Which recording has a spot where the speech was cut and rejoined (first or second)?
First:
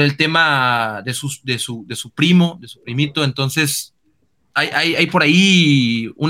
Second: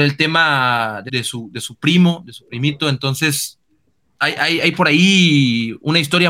second